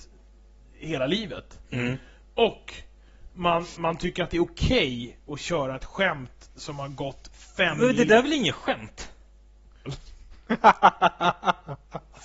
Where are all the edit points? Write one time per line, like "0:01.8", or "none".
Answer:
0:03.7
0:09.9